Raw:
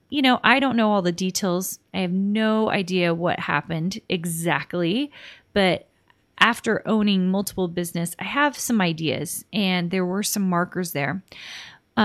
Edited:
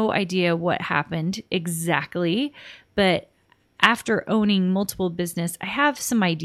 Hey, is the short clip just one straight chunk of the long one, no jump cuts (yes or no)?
yes